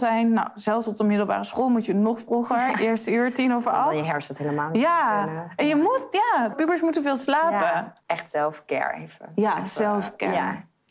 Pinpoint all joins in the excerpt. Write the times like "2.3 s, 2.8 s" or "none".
6.5 s, 8.0 s